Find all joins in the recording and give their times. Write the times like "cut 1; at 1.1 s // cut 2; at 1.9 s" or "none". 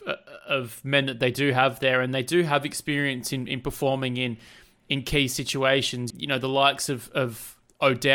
cut 1; at 6.1 s